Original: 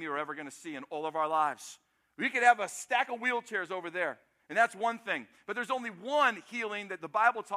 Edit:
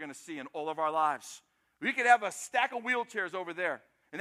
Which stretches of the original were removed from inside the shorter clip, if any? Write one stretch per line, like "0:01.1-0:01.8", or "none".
none